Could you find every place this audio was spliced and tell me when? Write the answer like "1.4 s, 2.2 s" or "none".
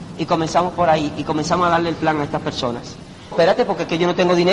3.3 s